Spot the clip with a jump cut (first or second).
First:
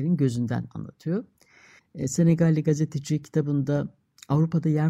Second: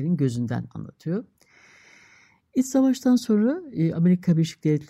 first